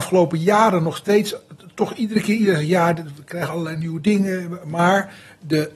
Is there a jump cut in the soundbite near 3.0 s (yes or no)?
no